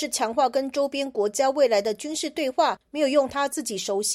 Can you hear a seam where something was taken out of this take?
yes; 1 cut; at 2.8 s

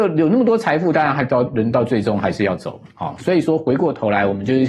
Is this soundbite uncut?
yes; 0 cuts

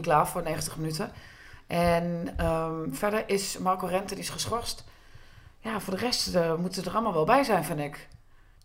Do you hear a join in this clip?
no; 0 cuts

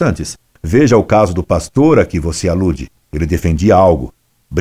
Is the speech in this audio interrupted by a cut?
no; 0 cuts

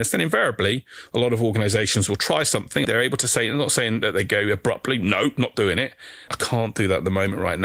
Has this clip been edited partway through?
yes; 2 cuts; at 2.8 s, 6.3 s

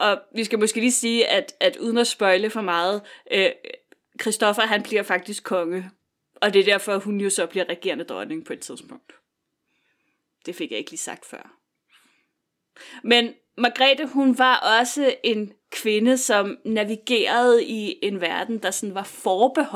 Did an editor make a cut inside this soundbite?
no; 0 cuts

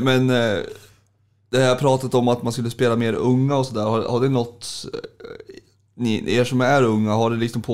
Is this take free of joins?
yes; 0 cuts

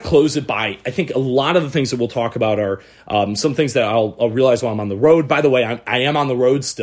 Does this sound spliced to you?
no; 0 cuts

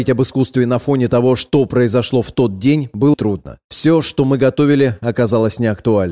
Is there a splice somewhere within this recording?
yes; 1 cut; at 3.1 s

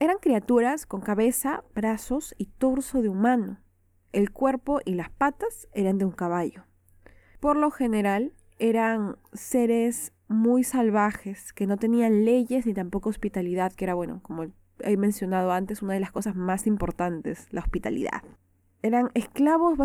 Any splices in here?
no; 0 cuts

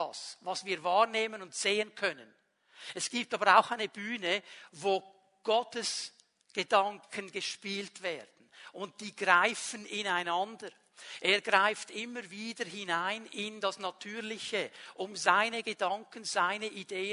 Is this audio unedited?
yes; 0 cuts

